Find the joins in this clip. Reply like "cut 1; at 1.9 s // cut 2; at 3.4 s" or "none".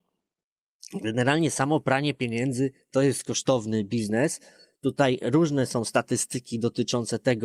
none